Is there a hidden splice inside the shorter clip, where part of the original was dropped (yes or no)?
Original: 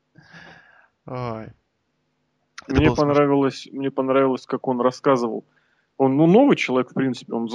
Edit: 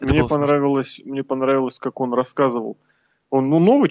no